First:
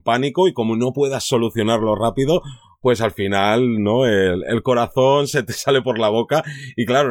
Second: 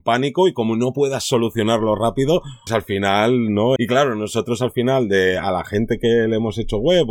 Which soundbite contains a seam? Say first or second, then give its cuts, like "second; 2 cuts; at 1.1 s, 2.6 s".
second; 2 cuts; at 2.7 s, 3.8 s